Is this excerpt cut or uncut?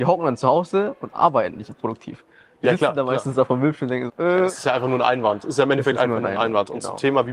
cut